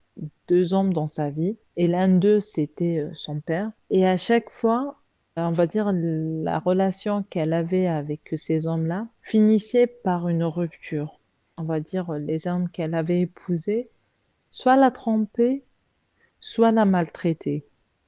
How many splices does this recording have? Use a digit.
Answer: 2